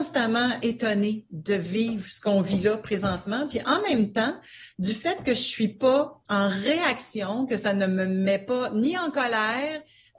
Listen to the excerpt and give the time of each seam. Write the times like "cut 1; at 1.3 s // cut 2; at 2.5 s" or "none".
cut 1; at 6.3 s